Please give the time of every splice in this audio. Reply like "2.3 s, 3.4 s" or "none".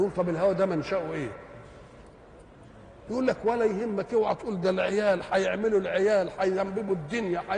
3.1 s